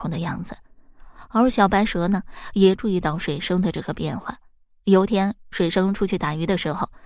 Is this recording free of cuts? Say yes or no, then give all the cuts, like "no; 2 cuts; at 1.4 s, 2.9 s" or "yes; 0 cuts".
yes; 0 cuts